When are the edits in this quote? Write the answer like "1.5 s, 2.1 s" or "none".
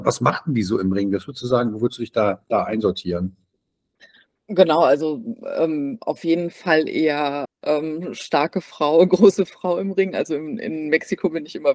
7.4 s